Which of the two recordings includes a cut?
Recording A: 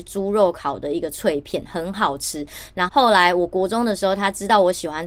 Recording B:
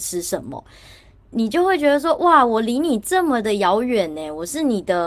A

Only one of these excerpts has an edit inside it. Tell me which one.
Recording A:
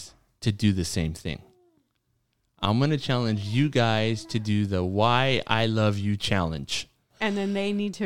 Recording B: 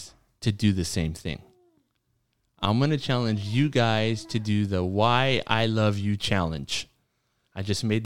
A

